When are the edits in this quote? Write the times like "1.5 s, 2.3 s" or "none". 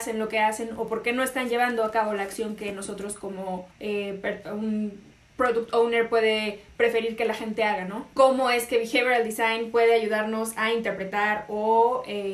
3.7 s, 8.1 s